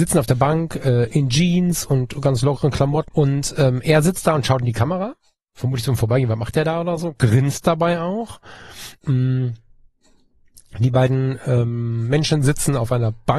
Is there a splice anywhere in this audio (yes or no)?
yes